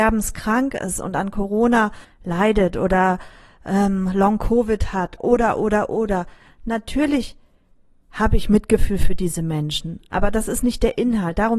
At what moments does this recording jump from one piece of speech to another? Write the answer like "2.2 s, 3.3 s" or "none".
none